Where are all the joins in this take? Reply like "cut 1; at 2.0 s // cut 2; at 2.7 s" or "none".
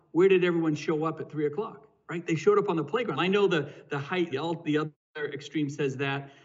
cut 1; at 3.2 s // cut 2; at 4.3 s